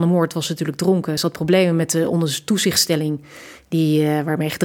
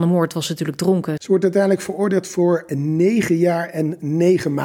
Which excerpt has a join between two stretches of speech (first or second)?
second